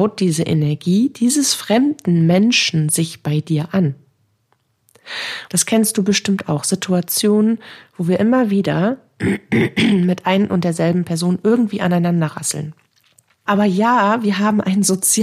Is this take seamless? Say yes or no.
no